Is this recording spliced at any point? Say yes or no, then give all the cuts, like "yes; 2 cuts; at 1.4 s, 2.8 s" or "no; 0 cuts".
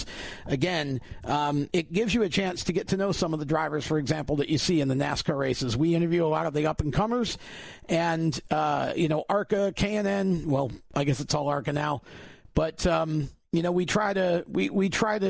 no; 0 cuts